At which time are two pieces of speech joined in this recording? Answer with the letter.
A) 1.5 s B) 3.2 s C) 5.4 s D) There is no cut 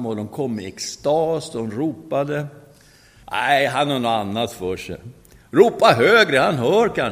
B